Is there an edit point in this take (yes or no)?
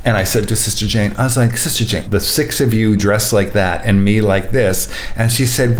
yes